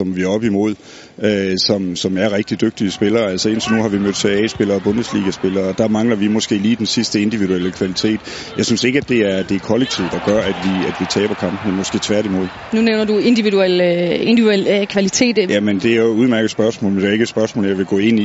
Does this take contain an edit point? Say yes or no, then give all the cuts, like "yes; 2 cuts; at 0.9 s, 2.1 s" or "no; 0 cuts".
yes; 1 cut; at 15.5 s